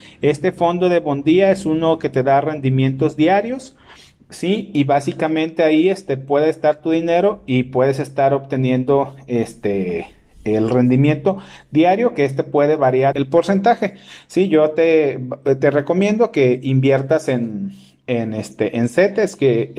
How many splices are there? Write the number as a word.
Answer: one